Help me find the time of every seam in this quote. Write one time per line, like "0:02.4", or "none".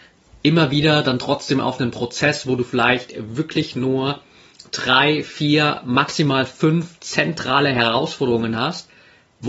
none